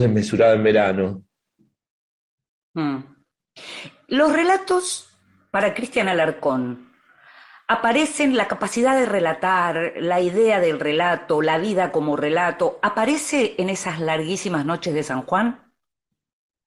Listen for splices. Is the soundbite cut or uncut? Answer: uncut